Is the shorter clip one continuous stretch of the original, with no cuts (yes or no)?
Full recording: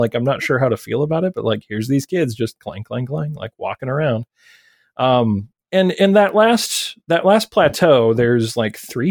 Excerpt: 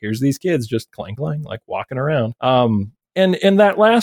no